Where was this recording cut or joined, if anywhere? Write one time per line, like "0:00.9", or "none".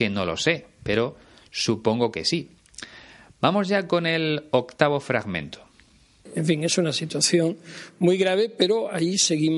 none

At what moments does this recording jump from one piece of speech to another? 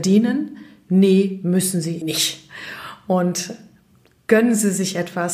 0:02.0

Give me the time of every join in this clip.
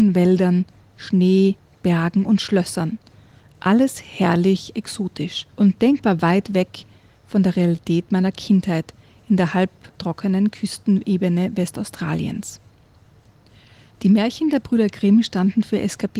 0:05.5

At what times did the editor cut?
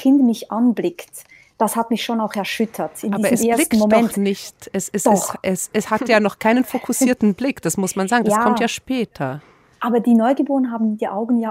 none

